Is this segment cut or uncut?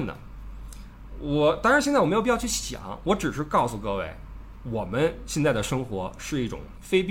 uncut